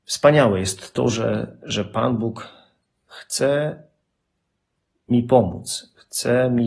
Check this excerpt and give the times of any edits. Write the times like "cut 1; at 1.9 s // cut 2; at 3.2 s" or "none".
none